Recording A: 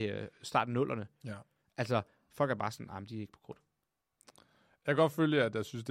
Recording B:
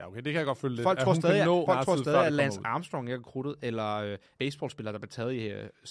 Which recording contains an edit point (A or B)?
B